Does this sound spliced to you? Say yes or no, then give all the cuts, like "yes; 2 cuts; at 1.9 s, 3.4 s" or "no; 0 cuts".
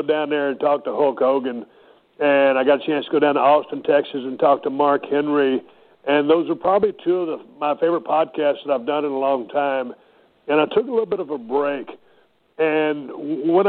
no; 0 cuts